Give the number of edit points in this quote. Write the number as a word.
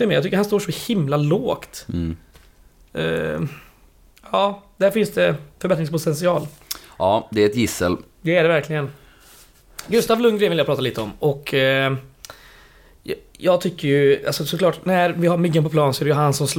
zero